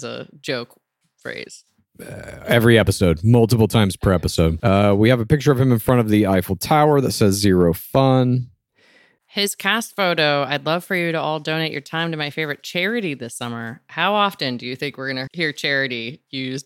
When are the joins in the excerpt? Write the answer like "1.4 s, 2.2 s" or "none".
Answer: 4.6 s, 9.2 s, 15.3 s

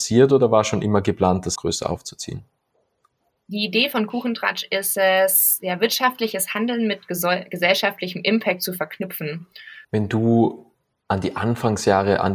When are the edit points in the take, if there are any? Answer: 1.6 s, 9.8 s

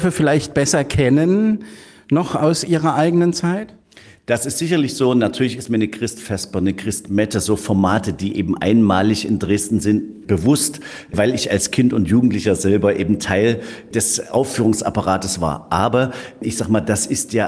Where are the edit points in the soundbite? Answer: none

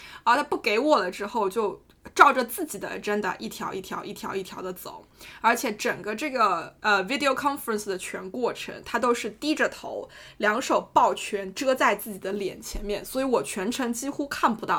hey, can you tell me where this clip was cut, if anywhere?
none

